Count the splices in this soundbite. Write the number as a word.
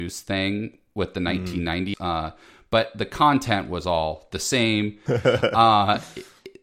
two